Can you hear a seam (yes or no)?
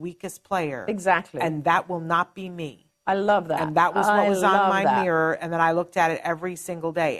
no